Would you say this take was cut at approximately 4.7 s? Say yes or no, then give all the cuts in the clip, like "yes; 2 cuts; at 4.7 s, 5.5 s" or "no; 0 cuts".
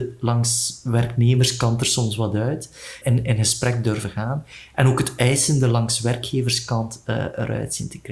no; 1 cut; at 3.0 s